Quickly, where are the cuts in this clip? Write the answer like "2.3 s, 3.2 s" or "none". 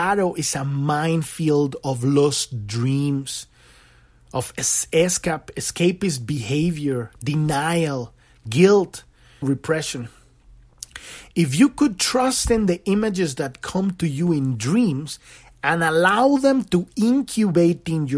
9.4 s